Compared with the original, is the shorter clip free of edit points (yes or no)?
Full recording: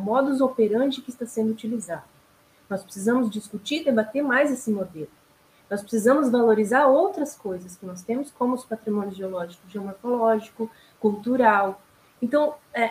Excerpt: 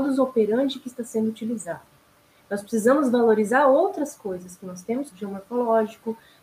no